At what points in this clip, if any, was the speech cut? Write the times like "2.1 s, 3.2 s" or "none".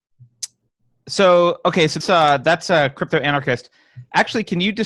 2.0 s